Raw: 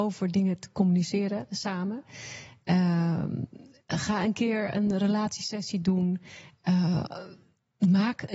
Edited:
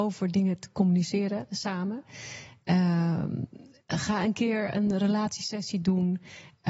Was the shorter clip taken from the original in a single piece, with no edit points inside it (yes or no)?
yes